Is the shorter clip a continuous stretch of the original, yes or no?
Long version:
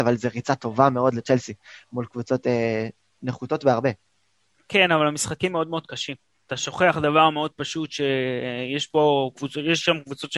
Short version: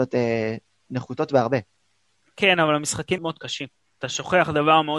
no